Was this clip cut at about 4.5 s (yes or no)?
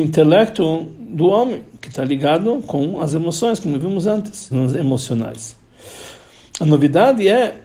yes